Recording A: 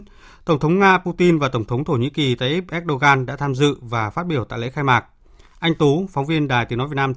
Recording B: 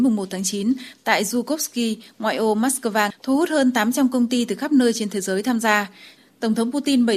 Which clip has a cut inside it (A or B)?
B